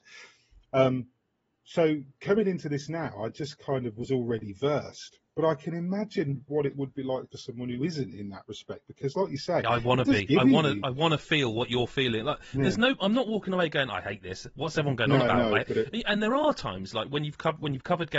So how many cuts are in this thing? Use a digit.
0